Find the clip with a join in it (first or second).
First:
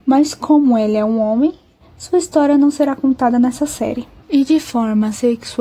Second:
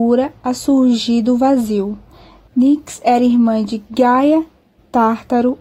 first